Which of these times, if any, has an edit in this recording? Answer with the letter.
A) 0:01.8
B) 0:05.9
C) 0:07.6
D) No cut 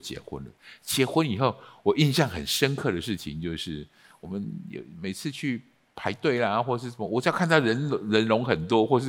D